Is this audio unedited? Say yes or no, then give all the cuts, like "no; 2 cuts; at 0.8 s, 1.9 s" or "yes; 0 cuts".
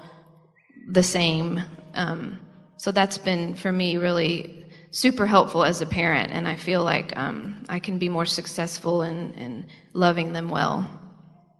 yes; 0 cuts